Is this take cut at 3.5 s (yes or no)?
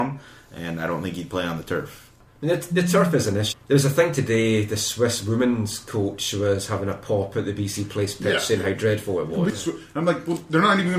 yes